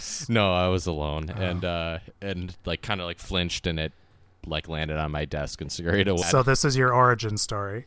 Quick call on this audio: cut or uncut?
cut